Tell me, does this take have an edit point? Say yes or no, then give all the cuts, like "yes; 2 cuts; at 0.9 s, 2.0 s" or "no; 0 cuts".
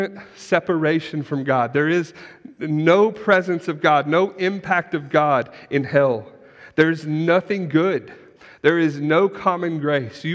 no; 0 cuts